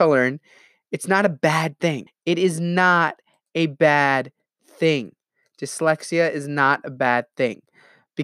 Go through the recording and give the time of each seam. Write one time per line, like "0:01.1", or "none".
0:02.1